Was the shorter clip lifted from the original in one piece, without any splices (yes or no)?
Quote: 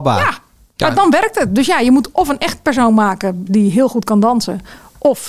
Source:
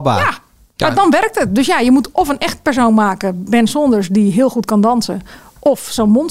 no